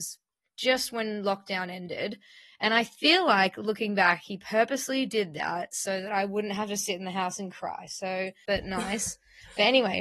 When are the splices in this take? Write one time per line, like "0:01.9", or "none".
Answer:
0:08.5

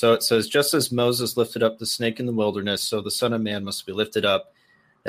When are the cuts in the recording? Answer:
none

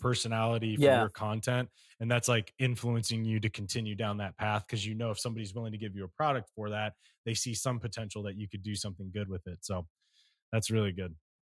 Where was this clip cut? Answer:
none

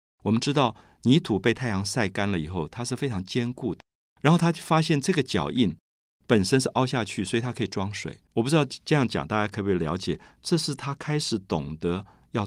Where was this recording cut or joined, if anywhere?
0:08.3

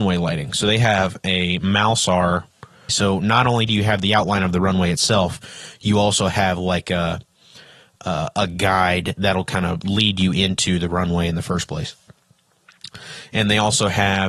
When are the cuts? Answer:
0:02.9

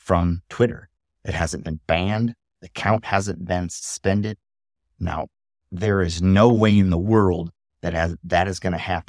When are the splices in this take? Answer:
none

